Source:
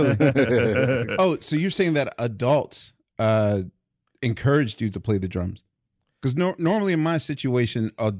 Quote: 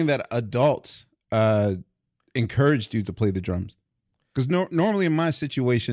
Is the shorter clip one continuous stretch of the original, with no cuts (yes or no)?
yes